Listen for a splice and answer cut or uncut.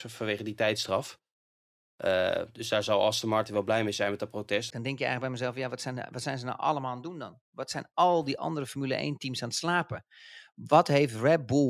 cut